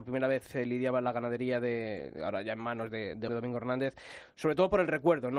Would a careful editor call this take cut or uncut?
cut